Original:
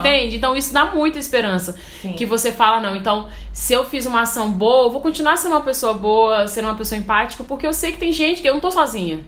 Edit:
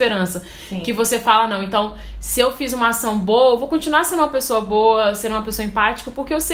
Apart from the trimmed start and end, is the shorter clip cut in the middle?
no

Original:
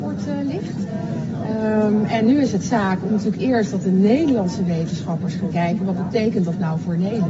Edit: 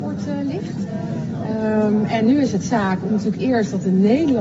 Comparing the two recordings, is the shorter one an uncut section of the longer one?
yes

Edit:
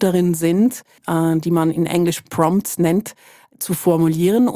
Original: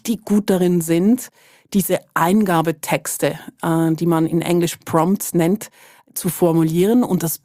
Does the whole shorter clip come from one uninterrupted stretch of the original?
no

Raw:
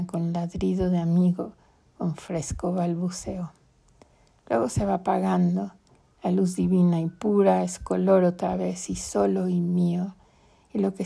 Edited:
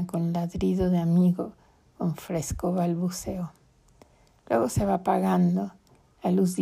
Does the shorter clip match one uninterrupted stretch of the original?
yes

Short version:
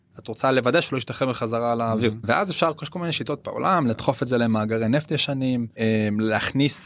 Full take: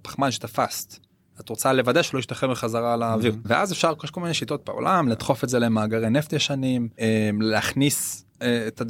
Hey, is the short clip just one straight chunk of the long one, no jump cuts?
yes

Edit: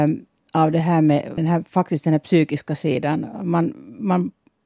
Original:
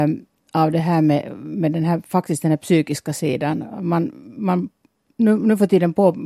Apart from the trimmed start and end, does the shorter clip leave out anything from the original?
yes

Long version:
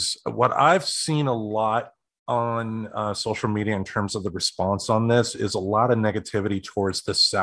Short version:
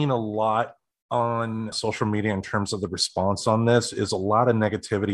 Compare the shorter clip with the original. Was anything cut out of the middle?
yes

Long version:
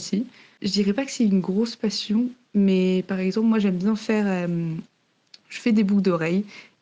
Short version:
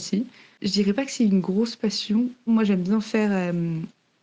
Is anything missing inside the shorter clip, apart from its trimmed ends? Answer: yes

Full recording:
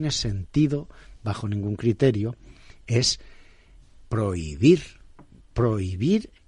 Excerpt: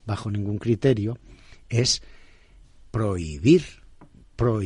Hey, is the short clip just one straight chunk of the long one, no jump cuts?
yes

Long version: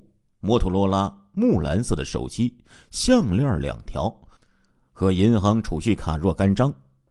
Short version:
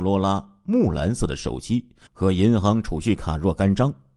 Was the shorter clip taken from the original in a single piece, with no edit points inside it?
no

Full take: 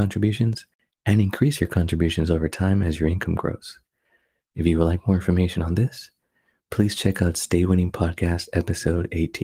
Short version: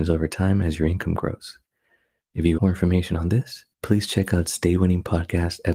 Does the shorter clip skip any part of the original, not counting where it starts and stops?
yes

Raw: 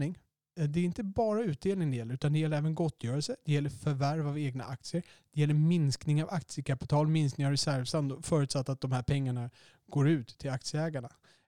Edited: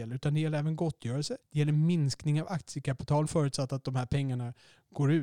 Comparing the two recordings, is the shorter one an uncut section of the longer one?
no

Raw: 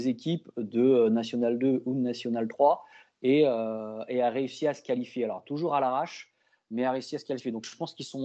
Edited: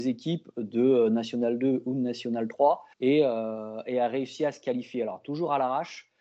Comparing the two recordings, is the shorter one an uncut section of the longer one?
no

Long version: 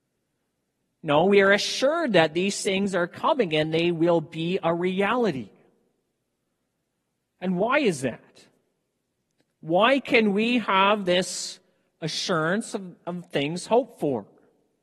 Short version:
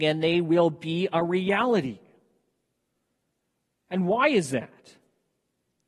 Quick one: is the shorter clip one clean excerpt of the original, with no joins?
yes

